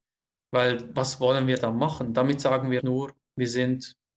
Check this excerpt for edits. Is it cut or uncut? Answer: cut